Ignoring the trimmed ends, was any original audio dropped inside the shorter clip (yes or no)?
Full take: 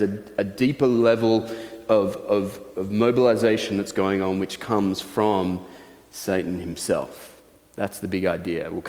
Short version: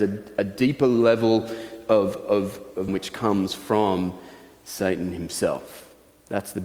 yes